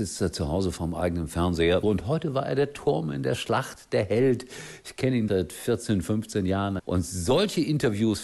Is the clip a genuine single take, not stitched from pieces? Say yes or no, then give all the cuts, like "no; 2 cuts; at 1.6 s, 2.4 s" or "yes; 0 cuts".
no; 3 cuts; at 1.8 s, 5.3 s, 6.8 s